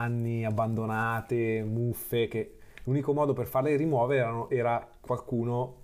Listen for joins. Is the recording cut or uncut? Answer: uncut